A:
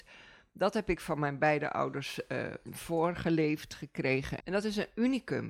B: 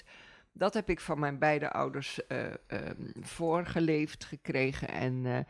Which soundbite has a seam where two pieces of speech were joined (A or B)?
A